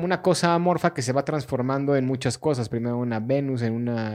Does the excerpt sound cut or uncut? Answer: uncut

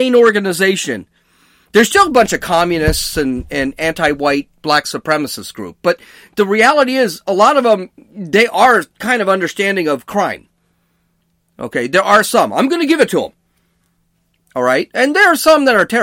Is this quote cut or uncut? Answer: uncut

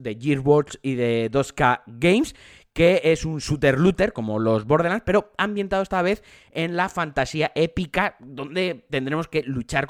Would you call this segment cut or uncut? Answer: uncut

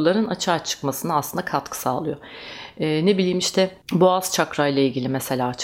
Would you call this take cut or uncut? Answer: cut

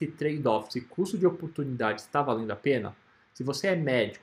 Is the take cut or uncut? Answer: uncut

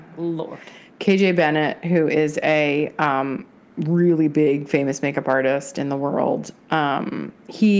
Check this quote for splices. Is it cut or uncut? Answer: uncut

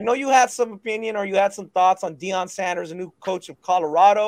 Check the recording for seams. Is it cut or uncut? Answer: uncut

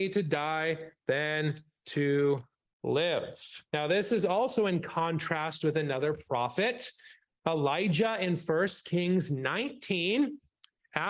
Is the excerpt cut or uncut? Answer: cut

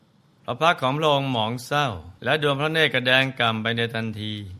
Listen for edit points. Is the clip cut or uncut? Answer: cut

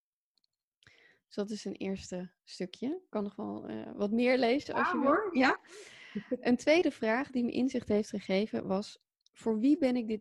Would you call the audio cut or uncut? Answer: uncut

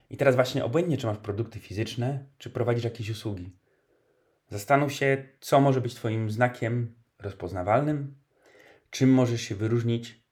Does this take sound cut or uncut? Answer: uncut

